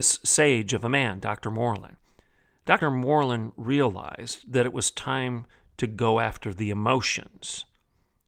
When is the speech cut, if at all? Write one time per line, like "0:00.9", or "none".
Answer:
0:02.8